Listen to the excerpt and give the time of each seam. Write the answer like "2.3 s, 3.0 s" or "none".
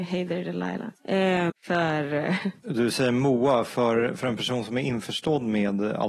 1.5 s